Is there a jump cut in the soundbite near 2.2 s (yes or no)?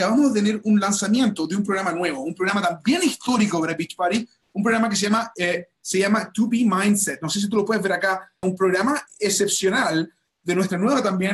no